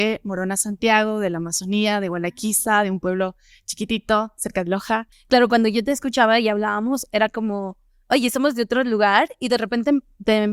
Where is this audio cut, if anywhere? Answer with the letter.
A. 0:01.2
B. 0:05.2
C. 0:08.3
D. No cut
D